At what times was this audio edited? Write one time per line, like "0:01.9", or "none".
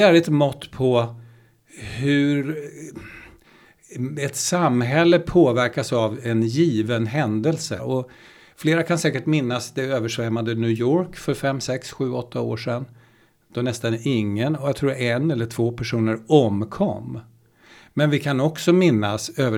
0:07.8